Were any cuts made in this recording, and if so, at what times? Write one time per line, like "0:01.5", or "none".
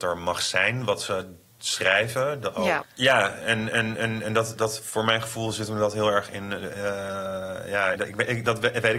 0:02.8
0:07.9